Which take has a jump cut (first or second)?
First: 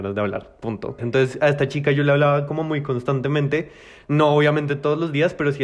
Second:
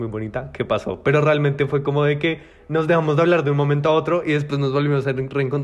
first